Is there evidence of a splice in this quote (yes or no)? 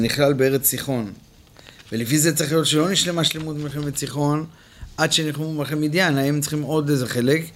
no